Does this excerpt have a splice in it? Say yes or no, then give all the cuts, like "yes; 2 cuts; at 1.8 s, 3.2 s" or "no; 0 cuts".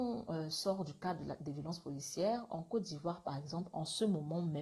no; 0 cuts